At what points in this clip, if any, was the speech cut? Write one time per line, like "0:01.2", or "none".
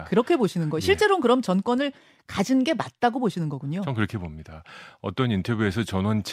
none